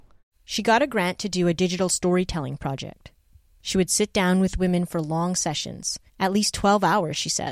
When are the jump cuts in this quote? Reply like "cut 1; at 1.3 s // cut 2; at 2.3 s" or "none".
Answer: cut 1; at 6.1 s